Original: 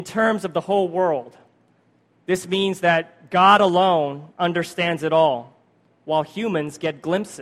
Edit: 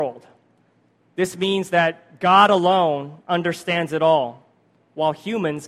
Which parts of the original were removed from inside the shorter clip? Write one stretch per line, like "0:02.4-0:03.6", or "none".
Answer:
none